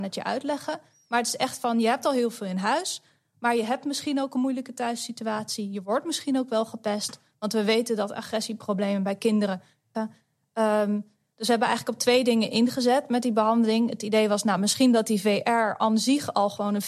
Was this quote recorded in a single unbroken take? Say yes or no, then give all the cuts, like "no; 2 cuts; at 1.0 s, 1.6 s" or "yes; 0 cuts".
no; 1 cut; at 9.9 s